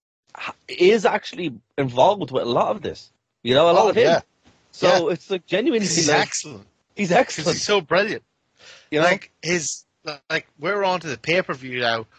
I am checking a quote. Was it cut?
yes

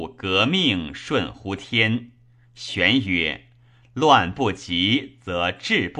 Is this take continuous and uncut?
yes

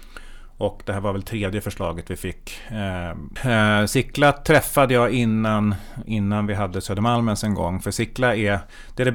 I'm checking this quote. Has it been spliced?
yes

